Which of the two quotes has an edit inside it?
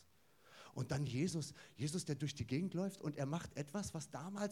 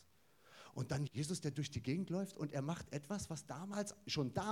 second; 1 cut; at 1.1 s

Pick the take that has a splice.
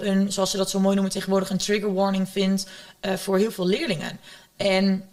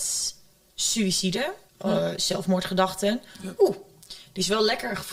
second; 2 cuts; at 1.7 s, 3.6 s

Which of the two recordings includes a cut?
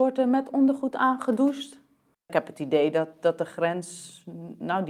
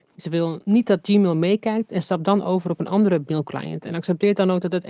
first; 1 cut; at 2.1 s

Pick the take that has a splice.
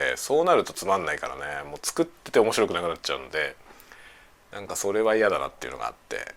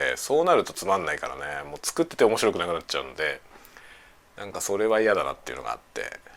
second; 1 cut; at 2.1 s

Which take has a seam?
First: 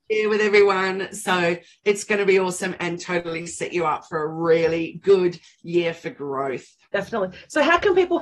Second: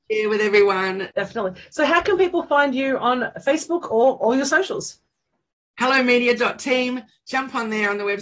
second; 1 cut; at 1.1 s

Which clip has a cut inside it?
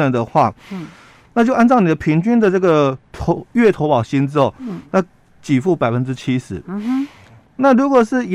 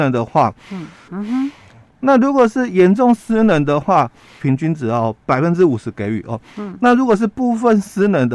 second; 2 cuts; at 1.1 s, 4.4 s

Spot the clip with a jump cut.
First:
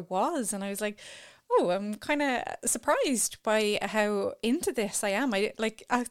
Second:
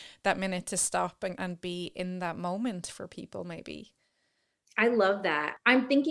second; 1 cut; at 1.4 s

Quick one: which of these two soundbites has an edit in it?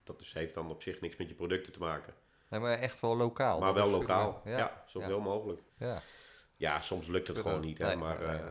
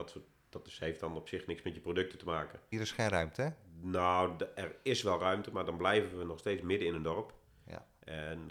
second; 1 cut; at 2.7 s

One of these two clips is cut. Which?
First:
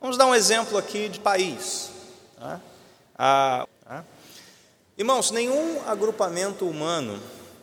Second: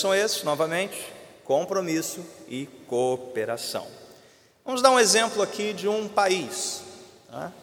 first; 2 cuts; at 1.2 s, 3.6 s

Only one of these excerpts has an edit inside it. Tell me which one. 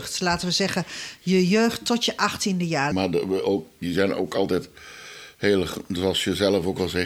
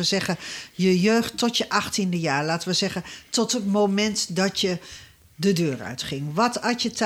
first; 1 cut; at 2.9 s

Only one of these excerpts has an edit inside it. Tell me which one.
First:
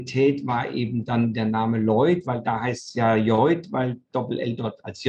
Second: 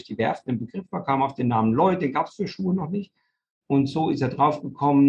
first; 1 cut; at 2.2 s

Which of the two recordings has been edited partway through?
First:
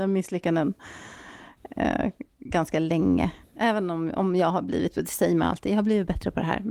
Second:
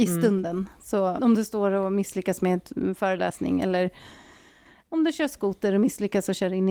second; 1 cut; at 1.2 s

